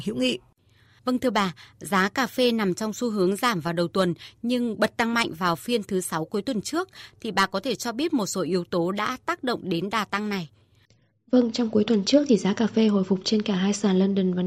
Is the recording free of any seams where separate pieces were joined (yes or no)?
yes